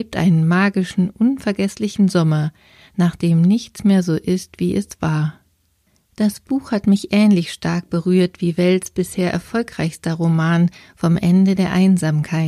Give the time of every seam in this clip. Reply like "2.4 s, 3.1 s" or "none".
none